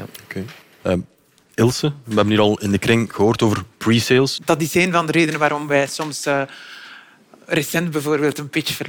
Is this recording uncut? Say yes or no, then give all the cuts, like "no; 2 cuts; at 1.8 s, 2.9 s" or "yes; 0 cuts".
no; 1 cut; at 4.4 s